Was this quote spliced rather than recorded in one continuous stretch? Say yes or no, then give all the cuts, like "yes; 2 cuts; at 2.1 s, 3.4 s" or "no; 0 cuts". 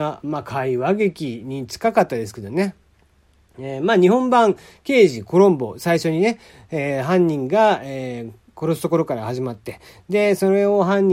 no; 0 cuts